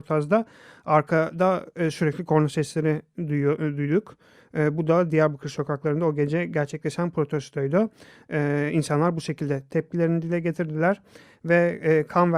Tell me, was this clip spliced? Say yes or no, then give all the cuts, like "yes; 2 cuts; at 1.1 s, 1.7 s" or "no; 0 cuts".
no; 0 cuts